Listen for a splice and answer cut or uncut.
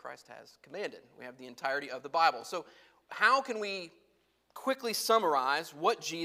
uncut